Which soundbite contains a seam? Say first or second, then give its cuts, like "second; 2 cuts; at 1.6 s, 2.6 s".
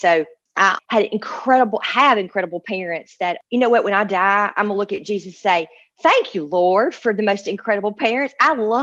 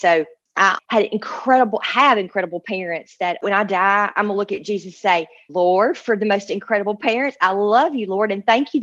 second; 3 cuts; at 3.4 s, 5.5 s, 7.4 s